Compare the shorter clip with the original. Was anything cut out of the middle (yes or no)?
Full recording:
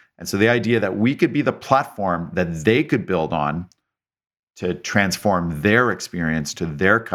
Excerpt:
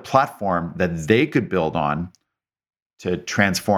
no